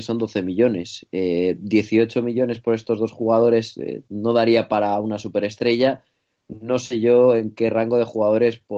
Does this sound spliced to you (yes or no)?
no